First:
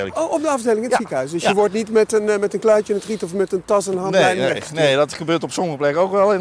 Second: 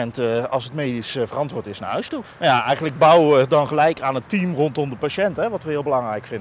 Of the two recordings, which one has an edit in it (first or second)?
second